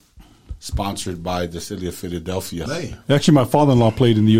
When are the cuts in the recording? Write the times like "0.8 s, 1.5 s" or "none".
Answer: 2.7 s